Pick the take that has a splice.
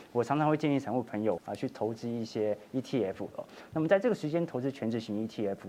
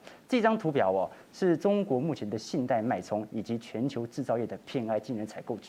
first; 2 cuts; at 1.4 s, 3.3 s

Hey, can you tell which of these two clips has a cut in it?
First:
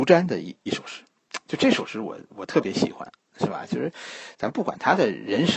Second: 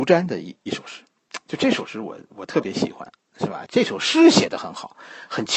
second; 1 cut; at 3.7 s

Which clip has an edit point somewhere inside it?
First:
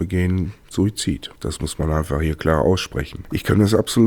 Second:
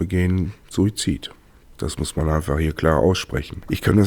first; 1 cut; at 1.4 s

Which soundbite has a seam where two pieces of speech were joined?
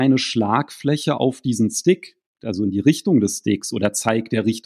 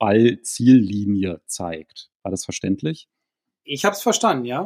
first; 1 cut; at 2.4 s

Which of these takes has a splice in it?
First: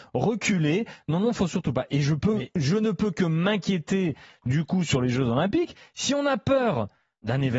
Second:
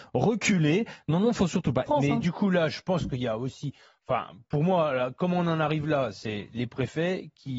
second; 1 cut; at 1.9 s

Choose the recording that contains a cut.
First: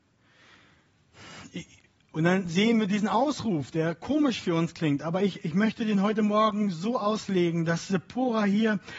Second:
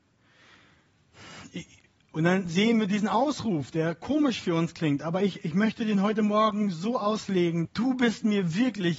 second; 1 cut; at 7.6 s

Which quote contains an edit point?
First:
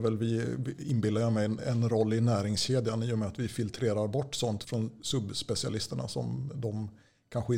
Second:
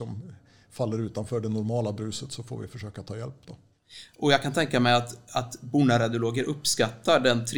first; 2 cuts; at 1.6 s, 4.6 s

